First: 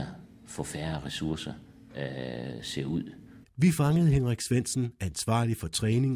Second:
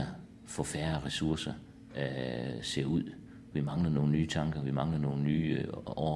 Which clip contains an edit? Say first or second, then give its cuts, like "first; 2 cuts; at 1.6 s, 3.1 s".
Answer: first; 1 cut; at 3.4 s